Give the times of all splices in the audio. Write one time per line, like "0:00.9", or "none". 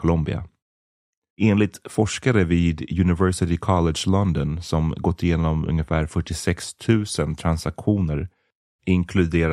0:01.3